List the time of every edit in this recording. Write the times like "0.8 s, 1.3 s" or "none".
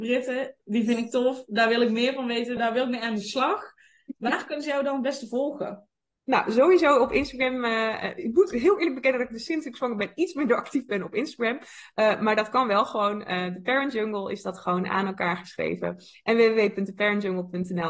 2.6 s